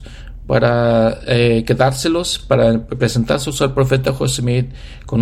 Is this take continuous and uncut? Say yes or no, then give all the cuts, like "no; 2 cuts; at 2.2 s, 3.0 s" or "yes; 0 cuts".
yes; 0 cuts